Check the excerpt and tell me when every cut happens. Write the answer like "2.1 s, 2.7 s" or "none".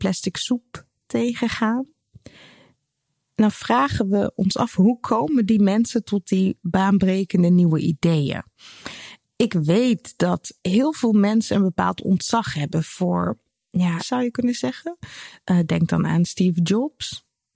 9.2 s, 14.0 s